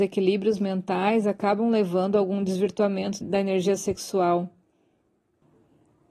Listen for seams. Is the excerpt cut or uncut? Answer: cut